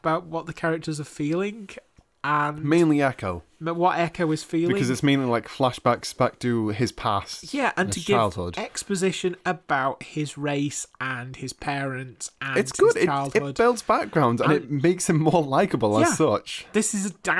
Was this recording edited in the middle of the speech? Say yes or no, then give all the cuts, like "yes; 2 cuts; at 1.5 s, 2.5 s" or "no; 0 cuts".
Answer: no; 0 cuts